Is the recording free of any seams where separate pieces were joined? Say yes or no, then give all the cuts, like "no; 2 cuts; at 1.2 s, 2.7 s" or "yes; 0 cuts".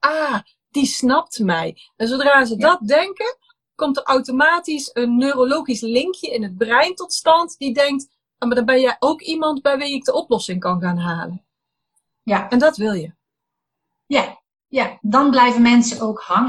yes; 0 cuts